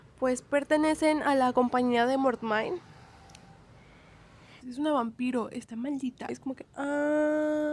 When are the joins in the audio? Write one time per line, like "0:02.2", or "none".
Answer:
0:04.6
0:06.3